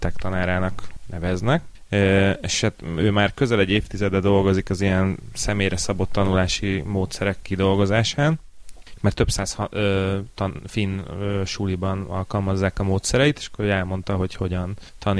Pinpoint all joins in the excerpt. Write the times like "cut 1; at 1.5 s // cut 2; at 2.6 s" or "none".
none